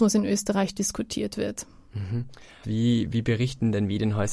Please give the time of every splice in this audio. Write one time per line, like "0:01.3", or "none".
0:02.6